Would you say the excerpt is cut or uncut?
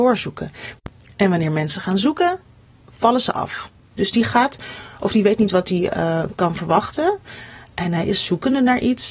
cut